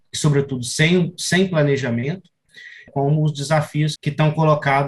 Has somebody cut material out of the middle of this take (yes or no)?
yes